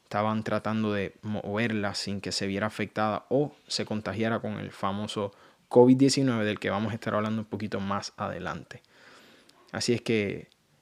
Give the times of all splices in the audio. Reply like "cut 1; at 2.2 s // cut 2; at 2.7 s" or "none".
none